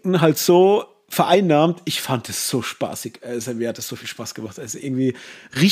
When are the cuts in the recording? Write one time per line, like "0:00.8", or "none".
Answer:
none